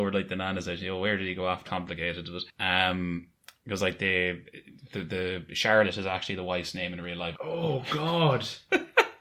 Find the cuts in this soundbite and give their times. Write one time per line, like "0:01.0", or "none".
0:01.6
0:07.3